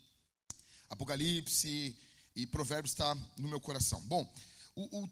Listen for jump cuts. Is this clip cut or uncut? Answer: uncut